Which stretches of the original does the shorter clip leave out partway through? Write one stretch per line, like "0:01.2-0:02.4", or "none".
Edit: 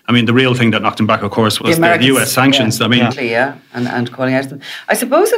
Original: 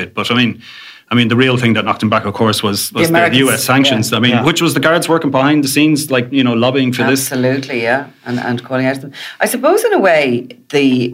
0:02.6-0:02.9
0:04.4-0:07.6

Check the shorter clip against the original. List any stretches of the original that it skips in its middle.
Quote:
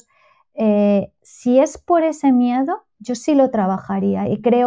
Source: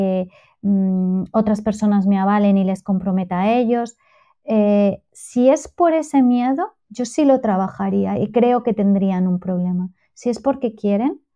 none

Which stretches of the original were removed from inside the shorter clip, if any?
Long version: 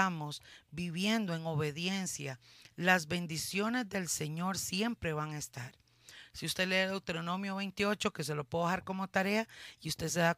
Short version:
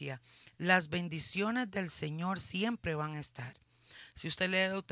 none

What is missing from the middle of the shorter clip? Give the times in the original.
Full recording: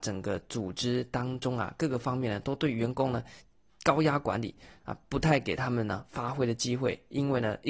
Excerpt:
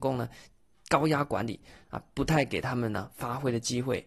none

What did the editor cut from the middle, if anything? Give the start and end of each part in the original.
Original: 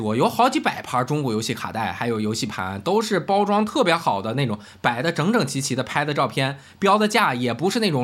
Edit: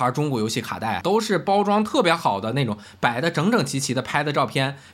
0:01.9-0:02.8

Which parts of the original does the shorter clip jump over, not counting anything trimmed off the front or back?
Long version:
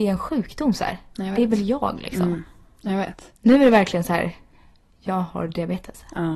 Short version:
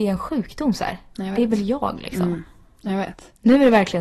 none

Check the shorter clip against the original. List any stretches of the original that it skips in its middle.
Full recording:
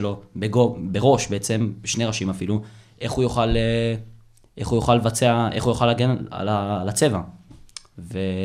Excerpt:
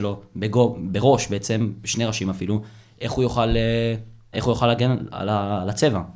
0:04.3-0:05.5

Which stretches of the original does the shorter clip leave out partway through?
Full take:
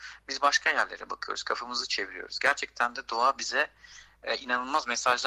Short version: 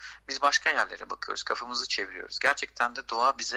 none

